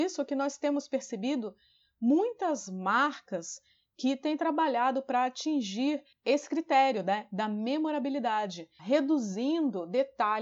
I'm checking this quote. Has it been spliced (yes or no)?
yes